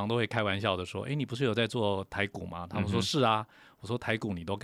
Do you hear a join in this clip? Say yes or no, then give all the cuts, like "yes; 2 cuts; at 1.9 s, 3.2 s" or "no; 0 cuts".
no; 0 cuts